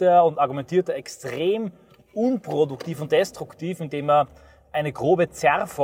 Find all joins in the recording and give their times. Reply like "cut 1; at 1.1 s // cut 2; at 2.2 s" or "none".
none

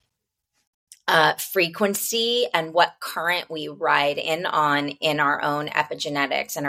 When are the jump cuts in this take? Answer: none

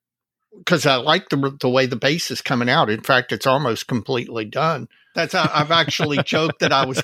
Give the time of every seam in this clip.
cut 1; at 5.1 s

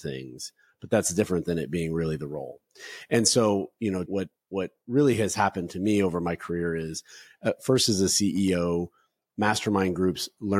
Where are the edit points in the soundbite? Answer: cut 1; at 4.1 s

